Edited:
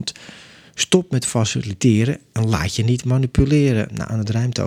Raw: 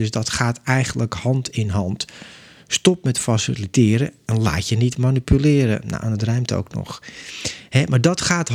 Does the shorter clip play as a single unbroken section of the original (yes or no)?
yes